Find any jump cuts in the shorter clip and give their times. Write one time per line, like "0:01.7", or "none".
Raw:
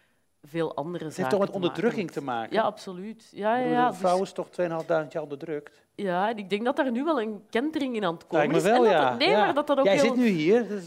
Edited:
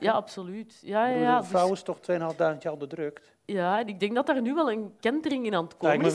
none